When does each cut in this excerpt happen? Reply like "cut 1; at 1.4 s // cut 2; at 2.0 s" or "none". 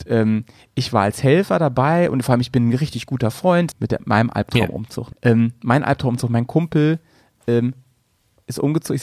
cut 1; at 3.7 s // cut 2; at 5.1 s